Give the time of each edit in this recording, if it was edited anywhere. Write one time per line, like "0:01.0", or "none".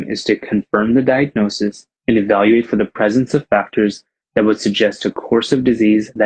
0:02.0

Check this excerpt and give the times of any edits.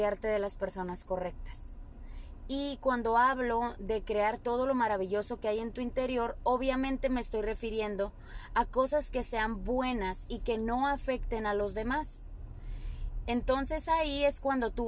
0:13.3

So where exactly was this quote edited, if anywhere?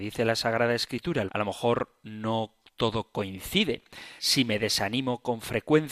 0:01.3
0:04.2

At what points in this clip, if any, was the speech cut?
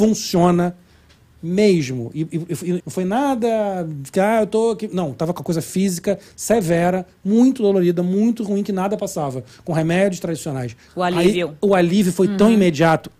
0:02.8
0:10.9

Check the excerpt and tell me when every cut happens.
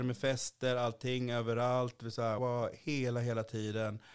0:02.4

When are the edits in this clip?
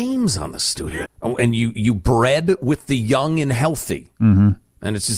0:01.0

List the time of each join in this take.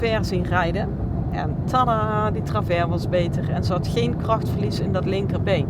0:01.3

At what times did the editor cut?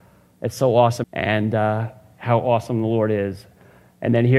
0:01.0

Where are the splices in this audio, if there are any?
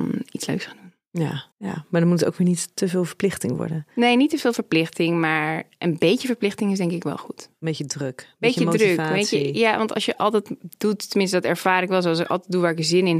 0:01.5

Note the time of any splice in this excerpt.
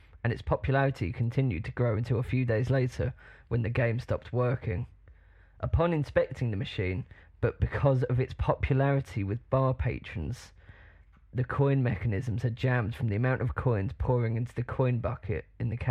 0:07.2

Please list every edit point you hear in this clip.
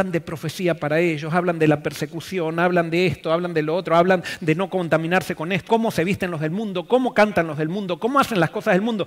0:05.7

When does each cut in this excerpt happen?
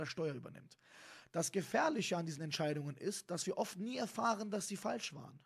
none

